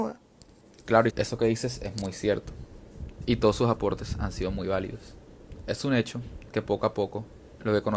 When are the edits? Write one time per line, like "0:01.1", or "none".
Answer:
0:01.1